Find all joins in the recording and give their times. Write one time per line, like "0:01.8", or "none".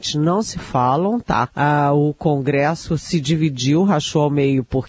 0:01.5